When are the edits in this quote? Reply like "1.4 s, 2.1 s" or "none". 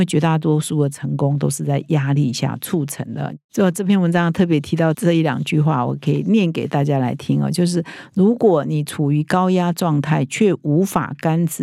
4.9 s